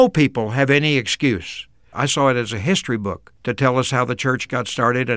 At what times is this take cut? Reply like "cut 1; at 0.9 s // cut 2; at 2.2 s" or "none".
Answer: cut 1; at 1.9 s // cut 2; at 3.4 s